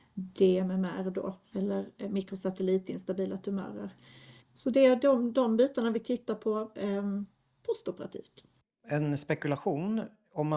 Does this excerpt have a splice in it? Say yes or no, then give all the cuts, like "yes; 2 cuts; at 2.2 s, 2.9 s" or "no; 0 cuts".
yes; 1 cut; at 4.4 s